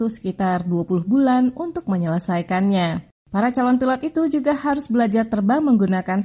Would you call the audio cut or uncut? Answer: cut